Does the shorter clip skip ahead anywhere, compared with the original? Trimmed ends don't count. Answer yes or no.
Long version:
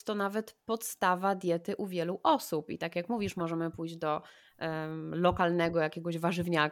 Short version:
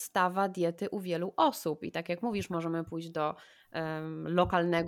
no